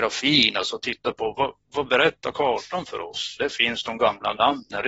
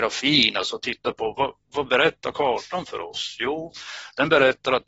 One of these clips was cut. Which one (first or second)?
first